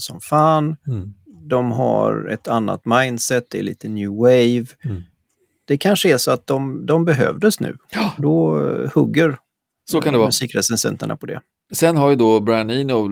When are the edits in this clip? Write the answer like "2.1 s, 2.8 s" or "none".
8.2 s